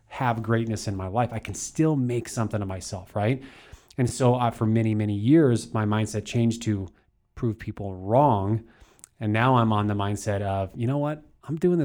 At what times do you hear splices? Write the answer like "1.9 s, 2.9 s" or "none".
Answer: none